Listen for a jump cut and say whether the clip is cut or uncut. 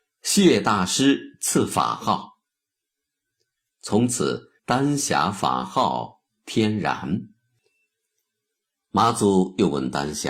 cut